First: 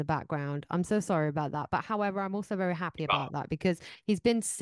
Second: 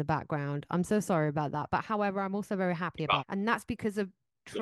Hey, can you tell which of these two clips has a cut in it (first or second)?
second